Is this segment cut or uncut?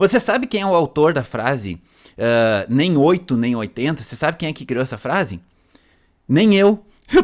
uncut